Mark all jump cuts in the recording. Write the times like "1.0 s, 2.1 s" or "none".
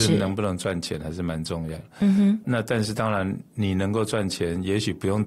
2.4 s

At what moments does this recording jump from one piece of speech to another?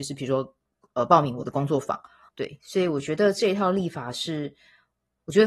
2.3 s

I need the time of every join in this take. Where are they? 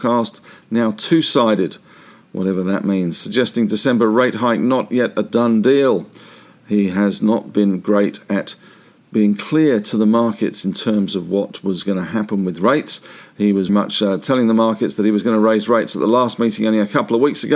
13.7 s

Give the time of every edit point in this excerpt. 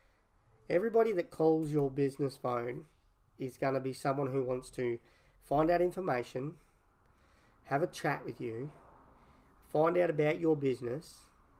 none

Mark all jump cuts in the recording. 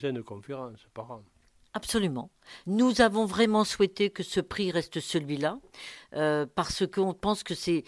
2.6 s

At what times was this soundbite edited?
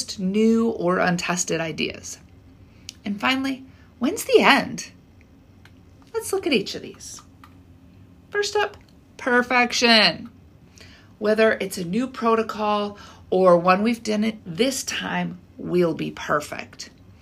14.4 s

